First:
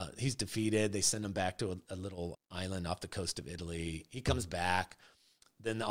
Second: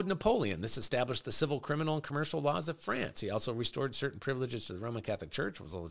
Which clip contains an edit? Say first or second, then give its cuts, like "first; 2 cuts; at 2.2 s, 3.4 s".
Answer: first; 1 cut; at 2.3 s